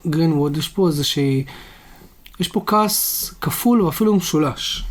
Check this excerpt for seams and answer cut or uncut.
uncut